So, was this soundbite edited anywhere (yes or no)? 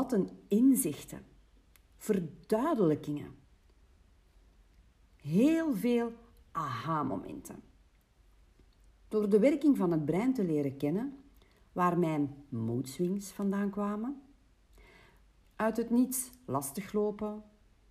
yes